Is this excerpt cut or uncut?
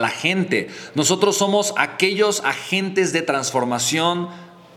uncut